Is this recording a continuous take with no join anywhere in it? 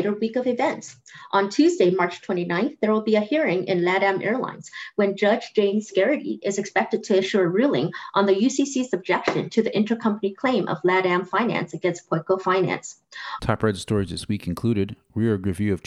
no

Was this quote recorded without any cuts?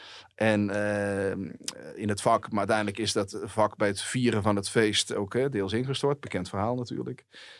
yes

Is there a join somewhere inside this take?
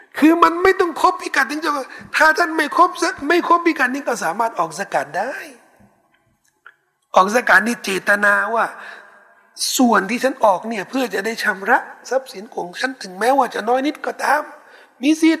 no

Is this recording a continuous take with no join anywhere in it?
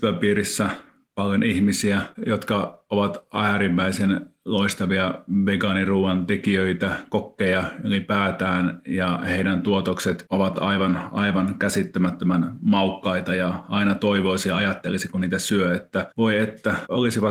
yes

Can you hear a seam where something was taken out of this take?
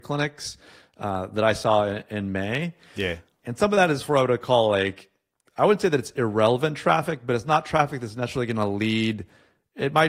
no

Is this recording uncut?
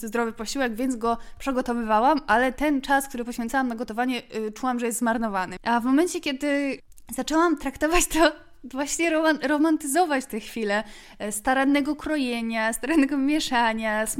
no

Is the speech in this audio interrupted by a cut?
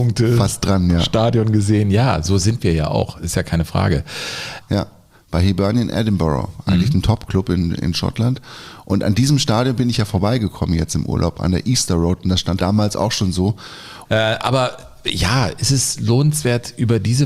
yes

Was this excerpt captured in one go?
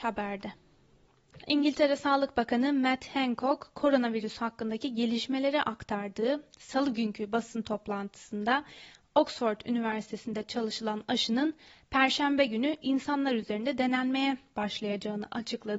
no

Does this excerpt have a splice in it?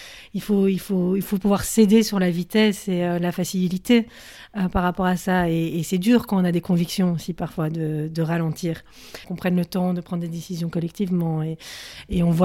yes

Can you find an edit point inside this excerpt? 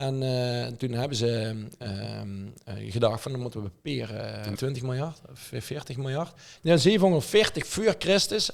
yes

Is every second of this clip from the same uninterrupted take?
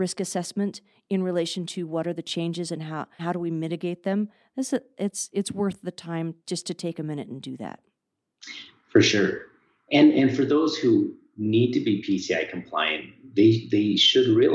no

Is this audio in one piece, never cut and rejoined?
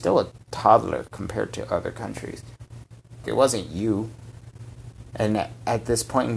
no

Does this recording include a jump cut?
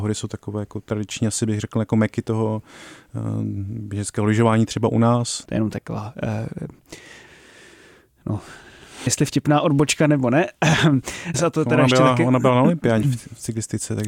yes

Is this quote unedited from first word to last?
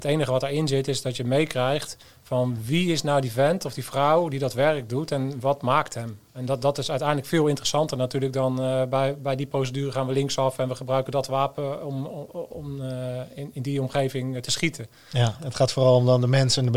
no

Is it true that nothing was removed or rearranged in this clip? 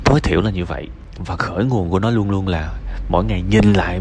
yes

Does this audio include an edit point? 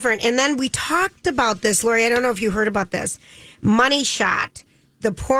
no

